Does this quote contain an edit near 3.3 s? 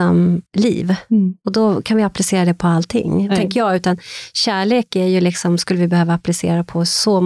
yes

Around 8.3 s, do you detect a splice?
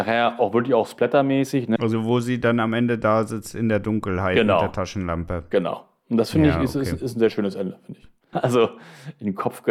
yes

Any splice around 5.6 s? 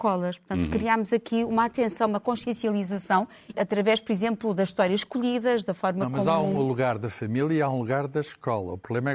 no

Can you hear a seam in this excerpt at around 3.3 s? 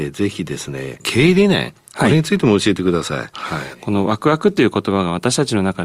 yes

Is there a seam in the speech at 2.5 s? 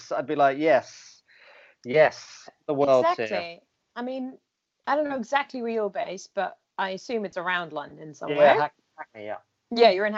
yes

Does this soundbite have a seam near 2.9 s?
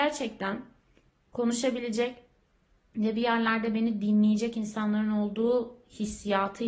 no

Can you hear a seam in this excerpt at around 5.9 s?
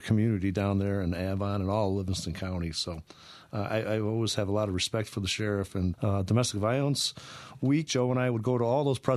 yes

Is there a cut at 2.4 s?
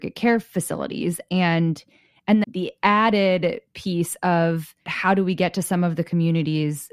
yes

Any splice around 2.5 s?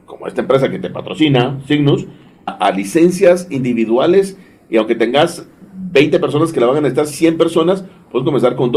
yes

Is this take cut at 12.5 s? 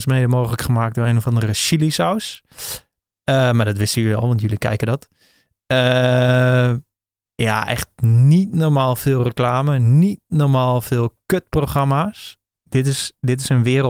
yes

